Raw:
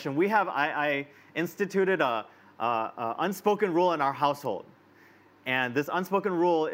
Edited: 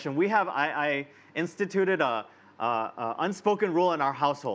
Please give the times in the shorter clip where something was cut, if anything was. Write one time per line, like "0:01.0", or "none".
none